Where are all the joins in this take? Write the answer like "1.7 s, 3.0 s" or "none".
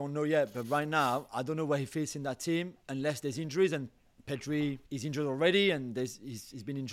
4.9 s